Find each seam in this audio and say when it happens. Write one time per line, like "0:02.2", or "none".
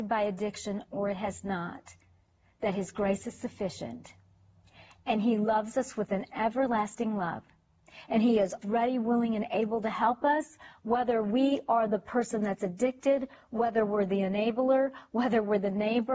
0:08.6